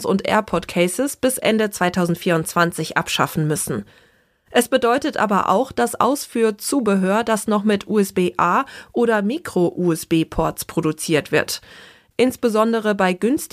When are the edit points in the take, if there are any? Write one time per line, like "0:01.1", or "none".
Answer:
none